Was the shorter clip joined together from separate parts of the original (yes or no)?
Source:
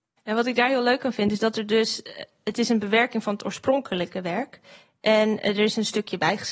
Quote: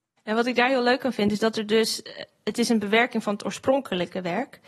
no